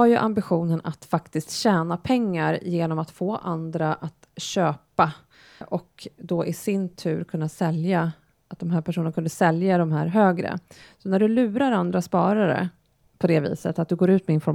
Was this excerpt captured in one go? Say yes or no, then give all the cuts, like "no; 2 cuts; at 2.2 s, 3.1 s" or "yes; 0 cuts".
no; 1 cut; at 5.6 s